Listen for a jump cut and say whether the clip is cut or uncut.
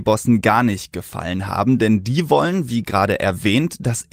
uncut